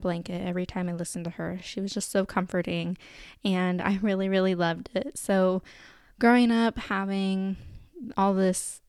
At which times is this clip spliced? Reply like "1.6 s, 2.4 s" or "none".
none